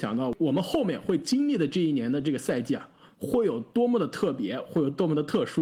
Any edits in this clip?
no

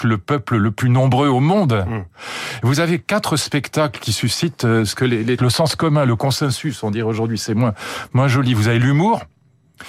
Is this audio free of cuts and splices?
no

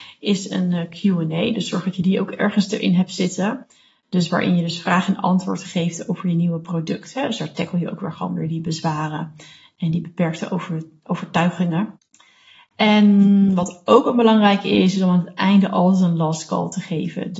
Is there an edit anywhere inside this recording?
no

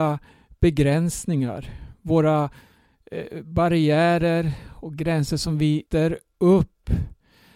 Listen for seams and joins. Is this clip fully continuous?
no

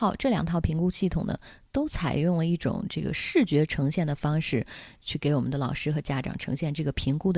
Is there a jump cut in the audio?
no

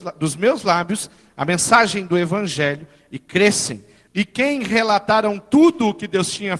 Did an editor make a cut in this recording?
yes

